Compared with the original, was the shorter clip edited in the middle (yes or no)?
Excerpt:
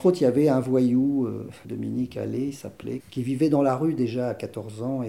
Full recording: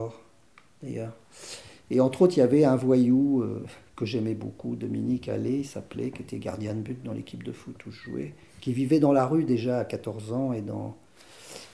yes